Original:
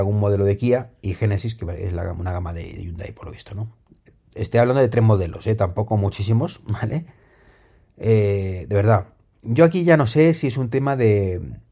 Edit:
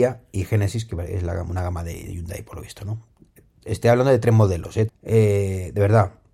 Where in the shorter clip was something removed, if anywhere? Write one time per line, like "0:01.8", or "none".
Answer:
0:04.9